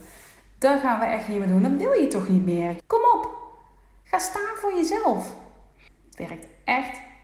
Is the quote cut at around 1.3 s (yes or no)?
no